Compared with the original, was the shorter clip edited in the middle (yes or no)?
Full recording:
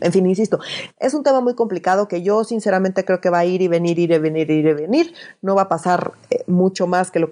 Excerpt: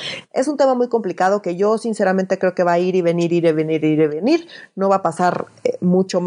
no